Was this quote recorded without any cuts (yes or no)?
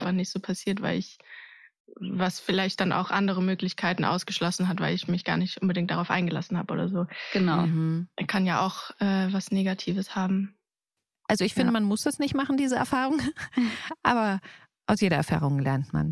yes